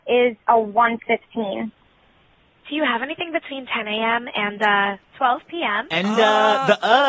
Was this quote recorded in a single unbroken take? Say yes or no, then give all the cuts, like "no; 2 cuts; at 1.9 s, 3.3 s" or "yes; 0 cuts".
yes; 0 cuts